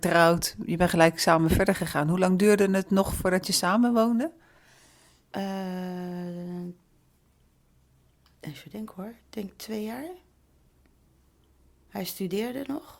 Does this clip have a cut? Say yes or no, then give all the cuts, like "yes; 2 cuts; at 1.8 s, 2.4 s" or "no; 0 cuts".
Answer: no; 0 cuts